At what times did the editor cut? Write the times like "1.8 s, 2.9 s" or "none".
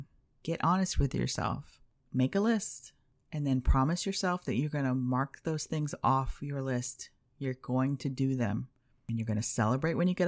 none